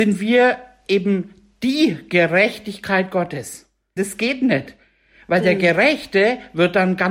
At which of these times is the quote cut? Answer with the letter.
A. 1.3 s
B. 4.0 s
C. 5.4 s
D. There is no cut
B